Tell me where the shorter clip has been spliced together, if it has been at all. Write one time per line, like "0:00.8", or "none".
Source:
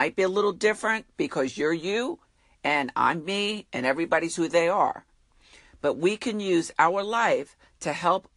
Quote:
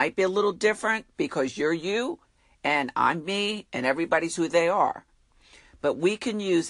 none